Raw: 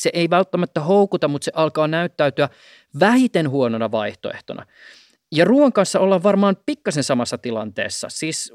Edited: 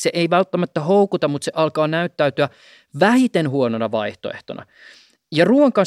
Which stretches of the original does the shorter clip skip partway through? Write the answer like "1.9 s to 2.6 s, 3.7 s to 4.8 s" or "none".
none